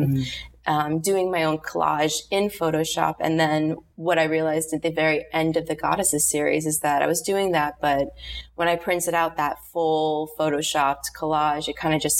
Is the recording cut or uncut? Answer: uncut